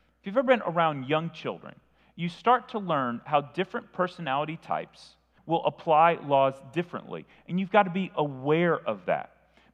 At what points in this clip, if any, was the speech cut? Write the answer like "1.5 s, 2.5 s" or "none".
5.4 s